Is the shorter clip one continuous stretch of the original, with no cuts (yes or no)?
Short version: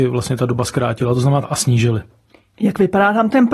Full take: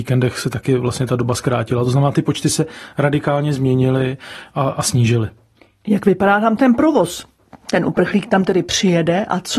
no